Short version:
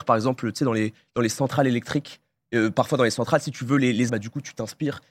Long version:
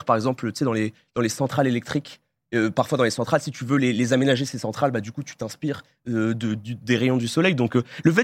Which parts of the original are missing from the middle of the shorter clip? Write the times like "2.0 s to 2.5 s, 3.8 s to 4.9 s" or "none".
4.1 s to 4.9 s